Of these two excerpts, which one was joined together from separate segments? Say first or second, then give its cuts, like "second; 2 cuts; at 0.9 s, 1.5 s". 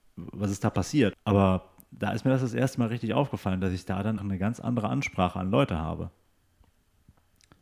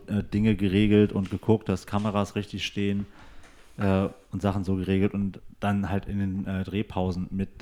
first; 2 cuts; at 1.1 s, 4.2 s